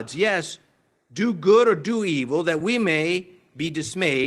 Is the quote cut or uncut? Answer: uncut